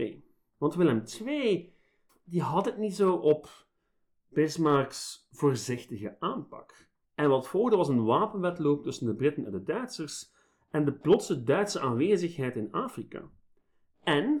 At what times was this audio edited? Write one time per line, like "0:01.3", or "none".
0:02.1
0:07.0